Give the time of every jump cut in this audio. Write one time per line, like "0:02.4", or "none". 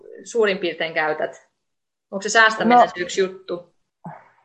none